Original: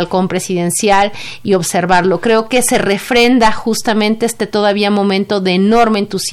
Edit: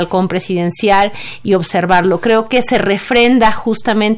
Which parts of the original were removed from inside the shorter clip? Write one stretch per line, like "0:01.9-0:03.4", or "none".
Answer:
none